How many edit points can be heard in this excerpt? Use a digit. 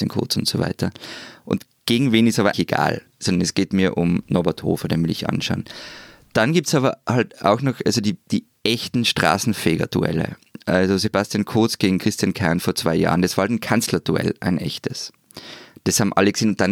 1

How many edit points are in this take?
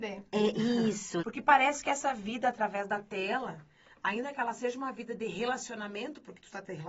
1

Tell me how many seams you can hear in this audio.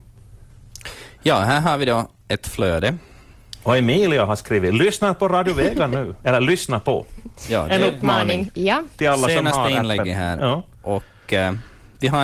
0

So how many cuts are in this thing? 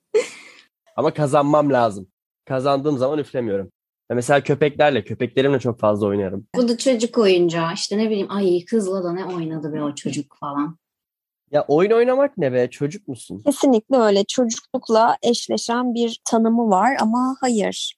1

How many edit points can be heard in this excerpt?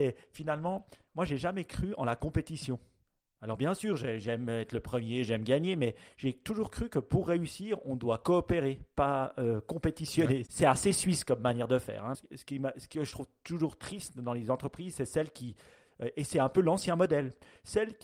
2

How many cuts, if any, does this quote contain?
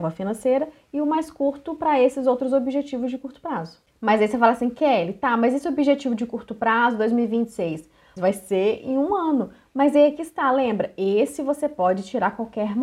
1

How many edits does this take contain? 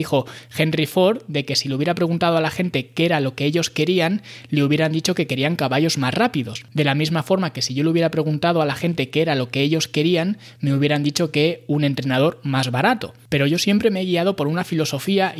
0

